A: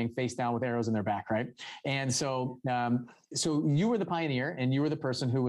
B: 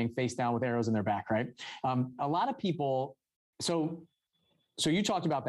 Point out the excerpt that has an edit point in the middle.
B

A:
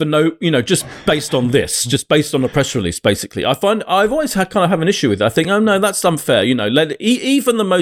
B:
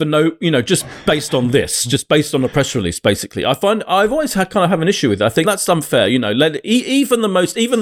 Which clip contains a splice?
B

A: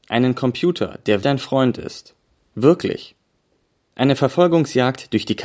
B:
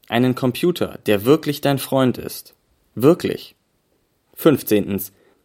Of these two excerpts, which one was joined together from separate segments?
A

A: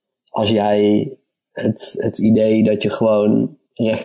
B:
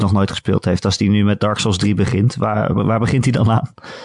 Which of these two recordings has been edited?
B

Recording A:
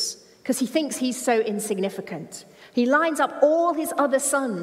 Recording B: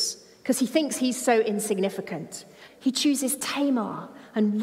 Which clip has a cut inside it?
B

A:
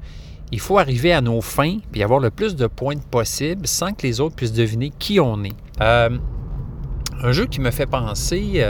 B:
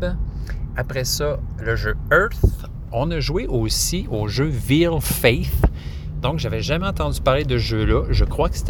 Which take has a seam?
A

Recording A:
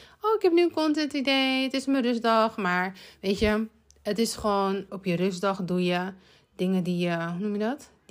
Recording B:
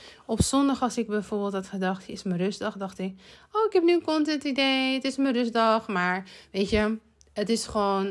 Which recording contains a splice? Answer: A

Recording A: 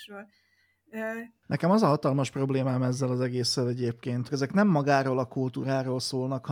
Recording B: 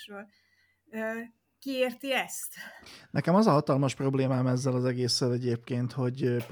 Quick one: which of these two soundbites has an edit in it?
A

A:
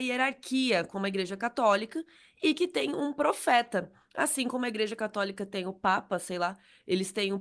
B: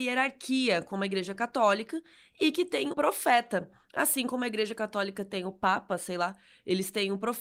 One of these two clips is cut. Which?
B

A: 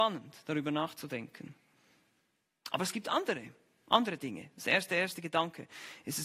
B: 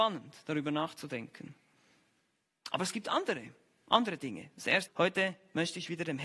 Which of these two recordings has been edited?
B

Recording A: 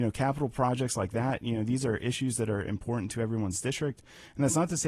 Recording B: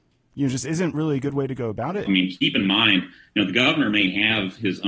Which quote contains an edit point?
B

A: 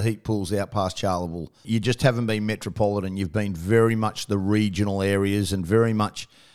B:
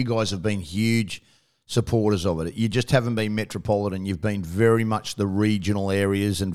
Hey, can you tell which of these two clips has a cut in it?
A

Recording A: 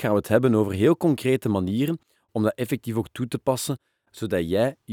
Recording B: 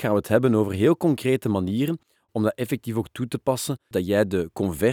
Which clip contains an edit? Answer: B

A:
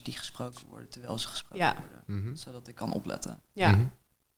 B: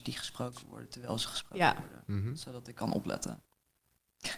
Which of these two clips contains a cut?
B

